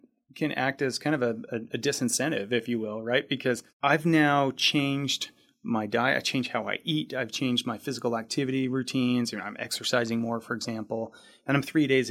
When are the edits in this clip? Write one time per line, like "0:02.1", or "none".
none